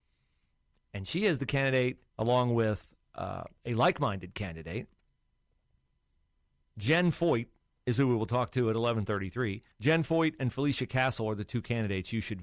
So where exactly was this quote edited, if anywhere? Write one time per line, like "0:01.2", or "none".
0:02.1
0:09.7